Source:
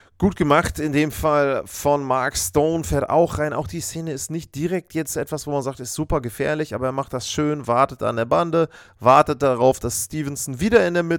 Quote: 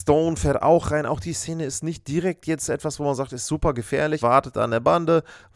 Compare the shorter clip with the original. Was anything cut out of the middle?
yes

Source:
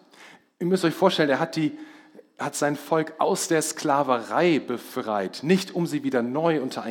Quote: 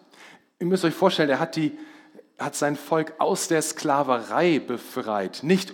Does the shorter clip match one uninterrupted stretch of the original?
yes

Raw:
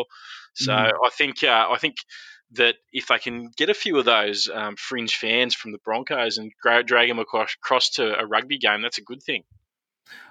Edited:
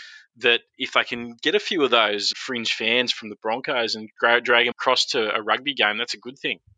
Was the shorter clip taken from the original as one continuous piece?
no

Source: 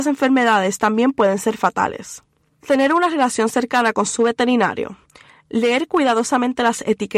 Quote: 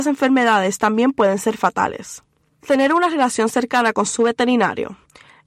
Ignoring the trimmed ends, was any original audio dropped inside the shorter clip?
no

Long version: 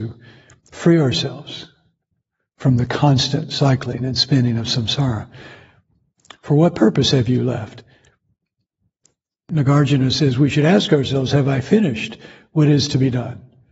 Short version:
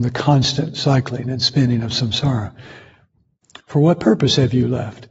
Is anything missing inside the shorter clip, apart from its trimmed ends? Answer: no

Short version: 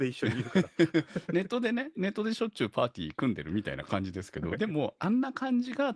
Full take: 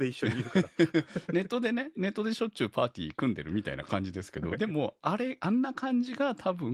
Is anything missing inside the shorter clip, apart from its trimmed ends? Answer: yes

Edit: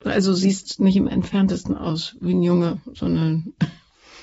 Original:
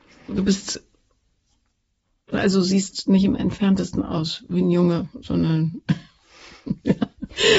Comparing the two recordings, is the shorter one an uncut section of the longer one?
yes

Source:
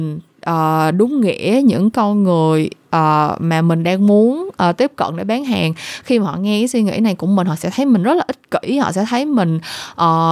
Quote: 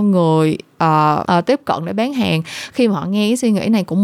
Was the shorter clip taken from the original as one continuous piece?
no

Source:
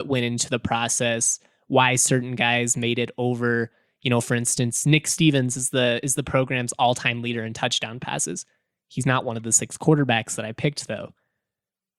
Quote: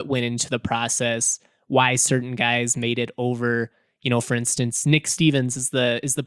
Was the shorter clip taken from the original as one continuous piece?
yes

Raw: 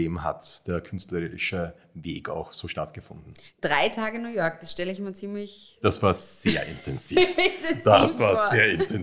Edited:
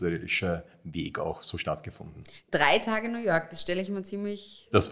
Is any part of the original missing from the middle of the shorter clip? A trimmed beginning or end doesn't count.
no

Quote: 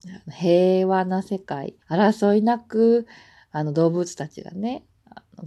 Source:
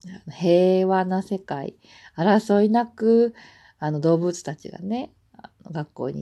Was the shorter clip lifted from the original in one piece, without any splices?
no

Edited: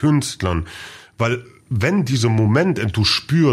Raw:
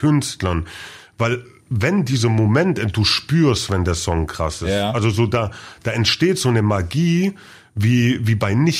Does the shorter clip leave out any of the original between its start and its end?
no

